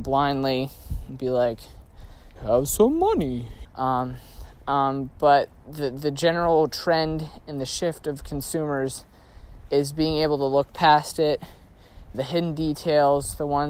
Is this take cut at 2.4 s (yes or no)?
yes